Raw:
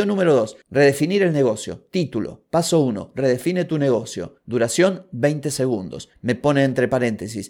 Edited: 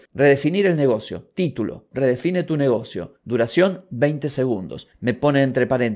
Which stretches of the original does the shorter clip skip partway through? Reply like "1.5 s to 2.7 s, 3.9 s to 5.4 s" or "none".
2.5 s to 3.1 s